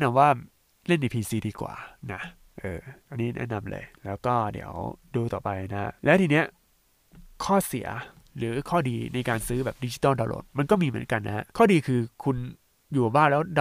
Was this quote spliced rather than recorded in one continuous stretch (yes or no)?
yes